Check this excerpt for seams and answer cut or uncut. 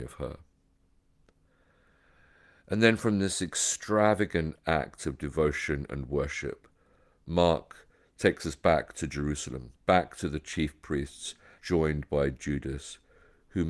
cut